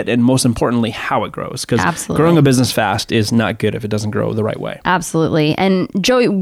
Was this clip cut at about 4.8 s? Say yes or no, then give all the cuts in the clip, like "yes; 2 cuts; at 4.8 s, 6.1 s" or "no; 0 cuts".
no; 0 cuts